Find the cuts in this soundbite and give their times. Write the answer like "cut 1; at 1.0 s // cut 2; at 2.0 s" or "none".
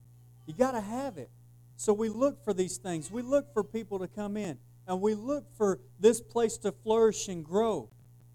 cut 1; at 1.7 s